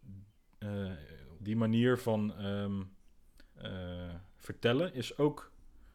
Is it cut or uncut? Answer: cut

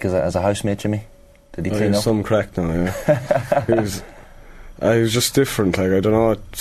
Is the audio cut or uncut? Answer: uncut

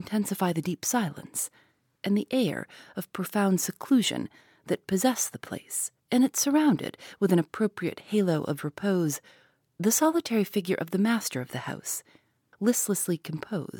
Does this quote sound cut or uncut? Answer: cut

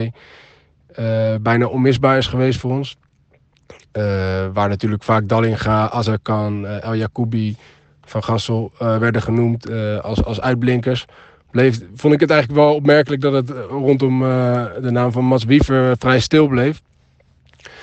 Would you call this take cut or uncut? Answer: uncut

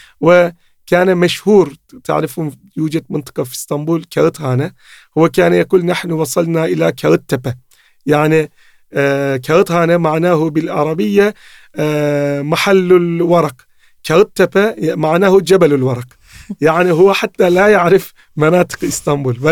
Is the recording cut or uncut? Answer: uncut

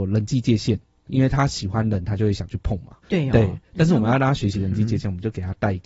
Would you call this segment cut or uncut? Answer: uncut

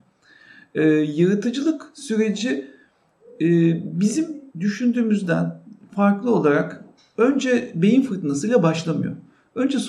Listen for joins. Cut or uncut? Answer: cut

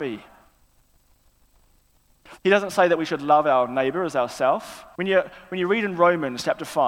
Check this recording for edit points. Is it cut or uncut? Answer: cut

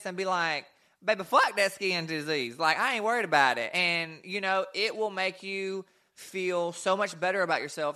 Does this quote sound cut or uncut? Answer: uncut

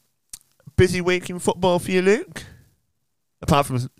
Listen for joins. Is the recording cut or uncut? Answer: uncut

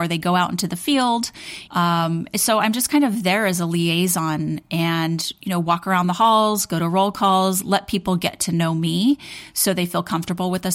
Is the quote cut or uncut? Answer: cut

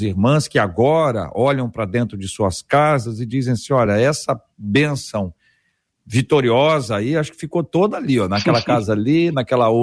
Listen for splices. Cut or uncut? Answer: uncut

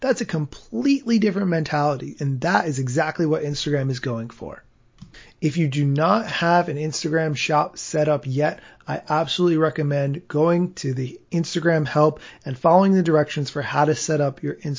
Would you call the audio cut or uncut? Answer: uncut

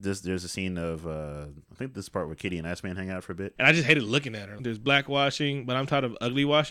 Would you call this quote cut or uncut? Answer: cut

